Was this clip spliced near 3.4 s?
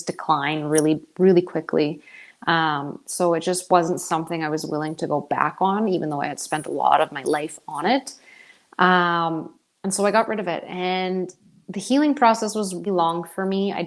no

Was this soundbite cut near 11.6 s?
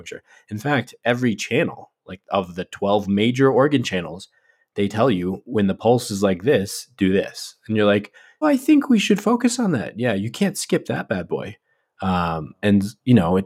no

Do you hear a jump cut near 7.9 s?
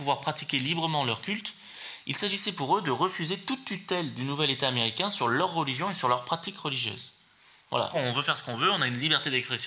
yes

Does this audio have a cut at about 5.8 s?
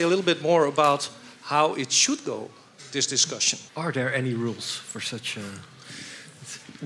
no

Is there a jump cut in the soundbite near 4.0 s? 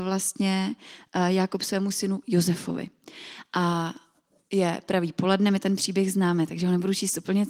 no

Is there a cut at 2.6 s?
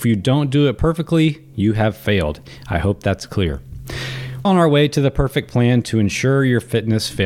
no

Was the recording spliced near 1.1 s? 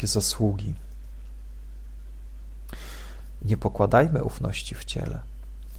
no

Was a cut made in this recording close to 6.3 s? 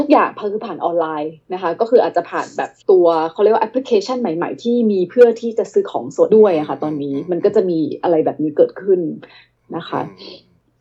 yes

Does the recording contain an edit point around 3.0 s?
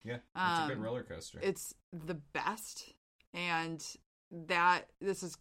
no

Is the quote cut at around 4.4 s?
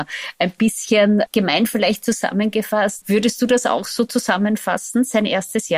no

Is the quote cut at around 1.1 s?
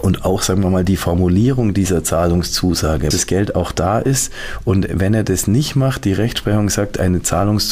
no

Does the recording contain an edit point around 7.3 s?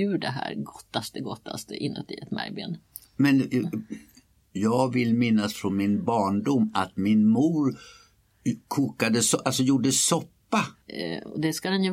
no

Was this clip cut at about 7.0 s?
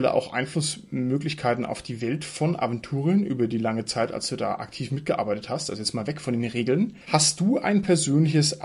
yes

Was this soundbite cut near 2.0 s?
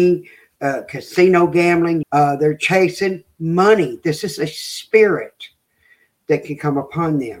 yes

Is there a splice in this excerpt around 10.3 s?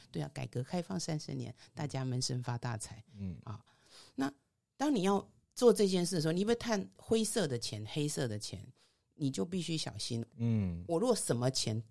yes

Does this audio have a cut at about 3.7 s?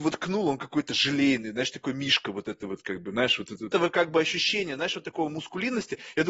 yes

